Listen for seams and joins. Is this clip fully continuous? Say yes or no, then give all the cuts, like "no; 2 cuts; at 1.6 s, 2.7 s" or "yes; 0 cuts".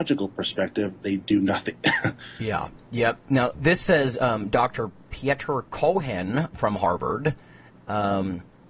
yes; 0 cuts